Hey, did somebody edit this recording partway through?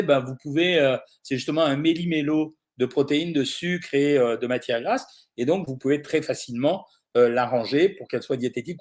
no; 0 cuts

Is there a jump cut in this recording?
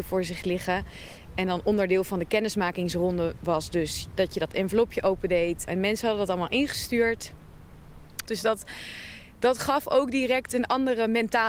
yes; 2 cuts; at 5.7 s, 8.3 s

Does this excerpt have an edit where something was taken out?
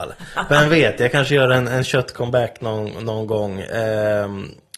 no; 0 cuts

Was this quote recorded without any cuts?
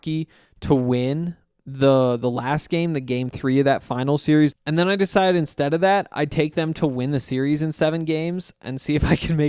no; 1 cut; at 4.5 s

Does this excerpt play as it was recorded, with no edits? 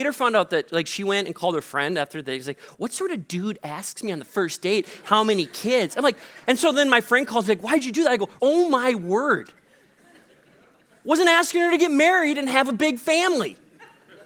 no; 1 cut; at 8.4 s

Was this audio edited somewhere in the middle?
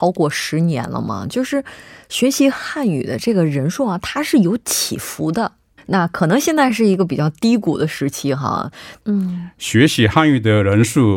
yes; 2 cuts; at 5.8 s, 9.0 s

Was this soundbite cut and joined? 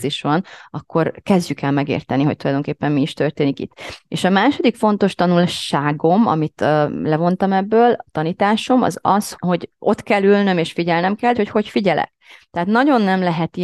yes; 2 cuts; at 9.3 s, 11.3 s

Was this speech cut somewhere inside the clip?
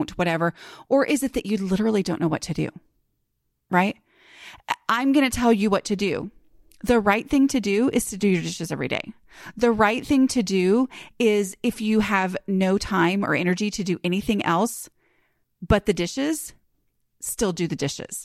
no; 0 cuts

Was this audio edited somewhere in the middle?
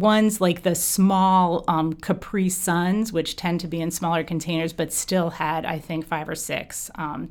no; 0 cuts

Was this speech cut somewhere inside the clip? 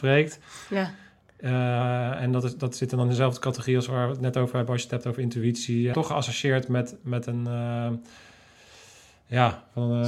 yes; 1 cut; at 5.9 s

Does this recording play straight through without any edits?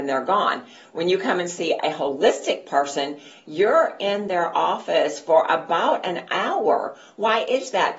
yes; 0 cuts

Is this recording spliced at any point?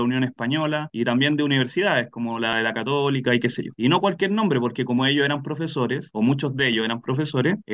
yes; 1 cut; at 3.7 s

